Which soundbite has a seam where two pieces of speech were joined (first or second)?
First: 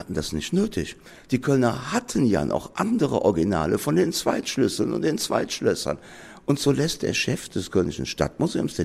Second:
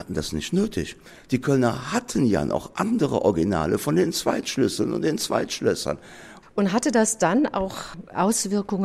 second